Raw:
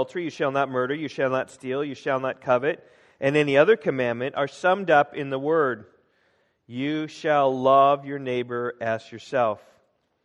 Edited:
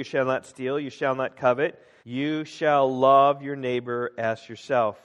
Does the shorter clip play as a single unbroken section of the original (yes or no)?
no